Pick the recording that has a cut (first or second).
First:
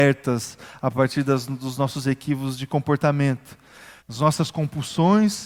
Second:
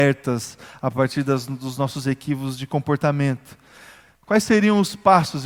first